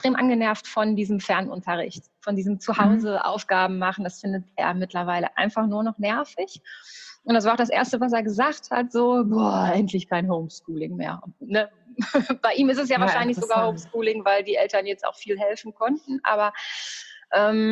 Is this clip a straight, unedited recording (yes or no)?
yes